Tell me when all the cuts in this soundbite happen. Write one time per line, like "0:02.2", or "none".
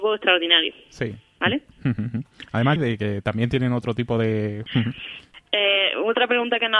0:02.8
0:04.7